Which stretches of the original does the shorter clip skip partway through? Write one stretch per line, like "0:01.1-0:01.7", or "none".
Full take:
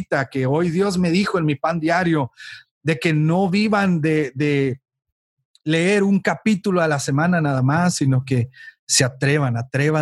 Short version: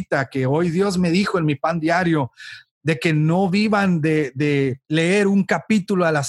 0:04.8-0:05.6